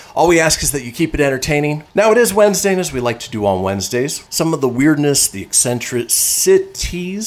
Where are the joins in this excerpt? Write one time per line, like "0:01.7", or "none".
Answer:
0:01.9
0:04.3